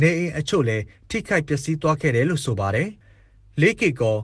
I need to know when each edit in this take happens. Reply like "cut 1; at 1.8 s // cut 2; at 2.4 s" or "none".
cut 1; at 3.0 s